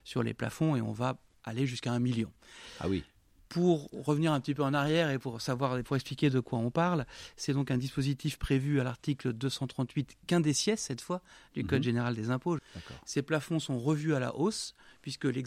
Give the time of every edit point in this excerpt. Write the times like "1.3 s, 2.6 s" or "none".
12.6 s